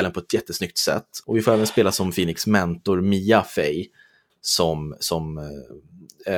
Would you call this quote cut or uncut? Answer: cut